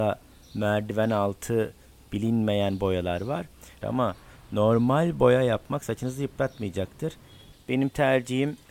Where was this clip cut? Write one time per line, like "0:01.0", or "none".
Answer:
0:03.8
0:07.5